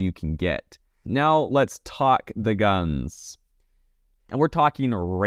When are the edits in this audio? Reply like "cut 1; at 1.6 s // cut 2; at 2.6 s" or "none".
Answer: cut 1; at 1.0 s // cut 2; at 4.2 s